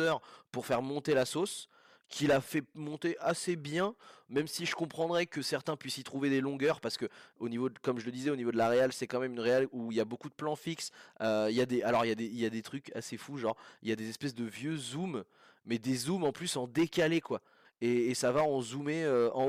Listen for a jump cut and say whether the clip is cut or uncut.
cut